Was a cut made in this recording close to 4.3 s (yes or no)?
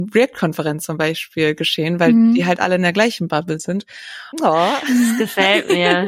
yes